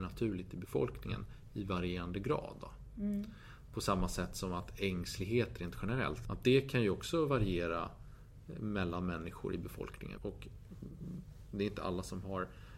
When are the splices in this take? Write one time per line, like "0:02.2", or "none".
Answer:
0:06.2
0:10.2